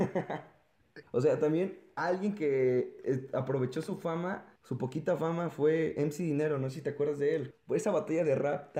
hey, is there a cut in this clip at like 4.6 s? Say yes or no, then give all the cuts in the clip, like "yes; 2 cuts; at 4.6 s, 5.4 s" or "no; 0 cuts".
yes; 3 cuts; at 1.0 s, 4.6 s, 7.5 s